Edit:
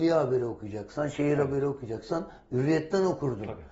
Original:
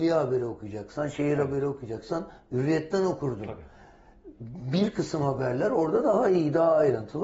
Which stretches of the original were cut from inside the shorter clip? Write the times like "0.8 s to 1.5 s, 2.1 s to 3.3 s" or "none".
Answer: none

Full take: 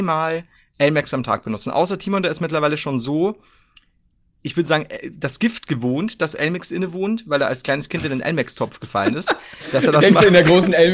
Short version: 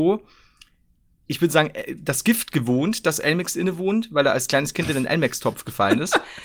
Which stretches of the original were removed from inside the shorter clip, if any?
none

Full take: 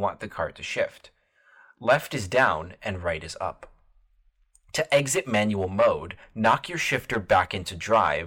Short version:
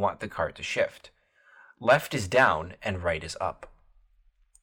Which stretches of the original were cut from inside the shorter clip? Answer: none

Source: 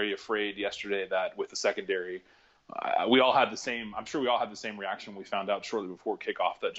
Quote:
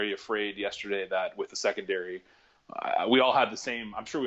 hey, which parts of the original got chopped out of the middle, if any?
none

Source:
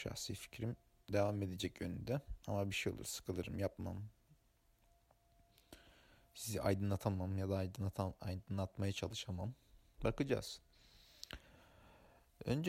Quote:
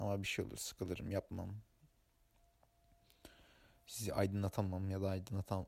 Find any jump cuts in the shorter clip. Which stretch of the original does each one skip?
none

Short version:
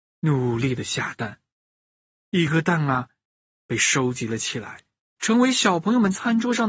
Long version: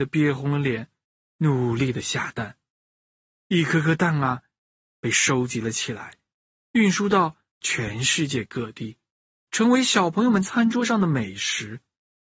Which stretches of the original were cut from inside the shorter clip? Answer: 3.7 s to 3.8 s, 6.4 s to 9.4 s

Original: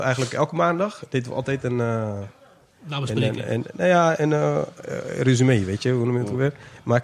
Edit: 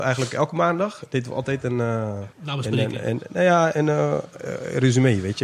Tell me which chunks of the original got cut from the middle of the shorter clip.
2.3 s to 2.8 s

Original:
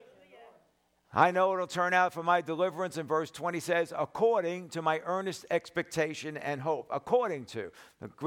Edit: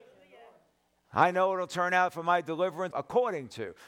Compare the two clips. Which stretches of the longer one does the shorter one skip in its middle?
2.9 s to 6.9 s

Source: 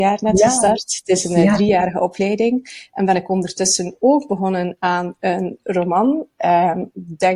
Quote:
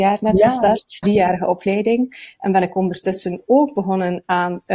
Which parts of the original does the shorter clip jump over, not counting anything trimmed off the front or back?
1.0 s to 1.6 s

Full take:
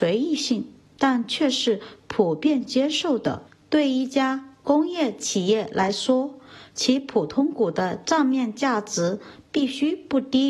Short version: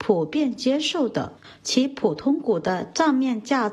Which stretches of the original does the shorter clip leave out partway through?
3.5 s to 6.6 s

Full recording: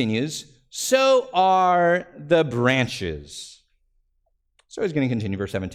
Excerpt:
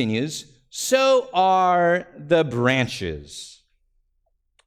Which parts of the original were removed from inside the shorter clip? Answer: none

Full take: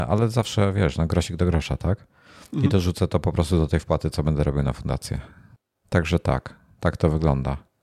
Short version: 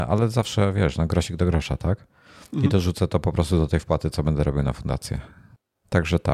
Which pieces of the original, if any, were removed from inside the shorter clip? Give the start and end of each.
none

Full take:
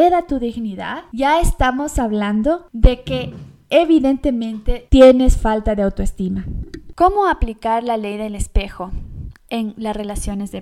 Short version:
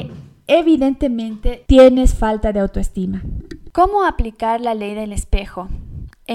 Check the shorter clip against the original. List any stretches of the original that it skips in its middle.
none

